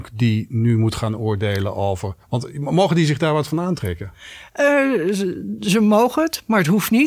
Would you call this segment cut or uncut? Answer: cut